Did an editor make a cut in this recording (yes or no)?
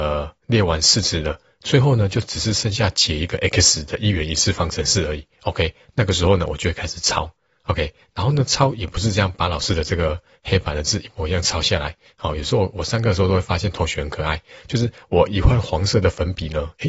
no